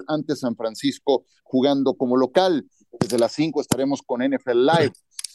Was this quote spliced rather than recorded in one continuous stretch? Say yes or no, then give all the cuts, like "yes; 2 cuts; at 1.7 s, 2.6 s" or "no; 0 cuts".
yes; 1 cut; at 3.0 s